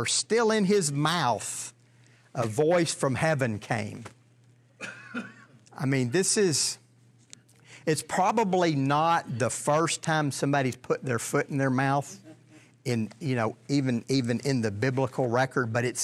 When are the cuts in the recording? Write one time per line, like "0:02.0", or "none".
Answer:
none